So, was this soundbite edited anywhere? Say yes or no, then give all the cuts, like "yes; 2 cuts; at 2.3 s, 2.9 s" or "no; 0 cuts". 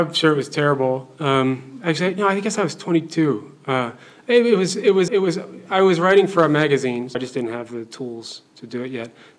yes; 2 cuts; at 5.1 s, 7.1 s